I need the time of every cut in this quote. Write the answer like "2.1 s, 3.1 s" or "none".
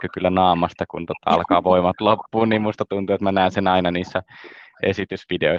none